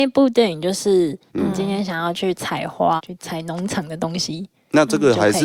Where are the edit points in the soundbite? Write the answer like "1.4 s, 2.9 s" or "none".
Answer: 1.3 s, 3.0 s